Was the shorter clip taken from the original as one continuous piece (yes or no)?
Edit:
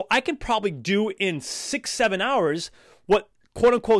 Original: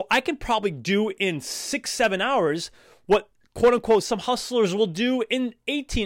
yes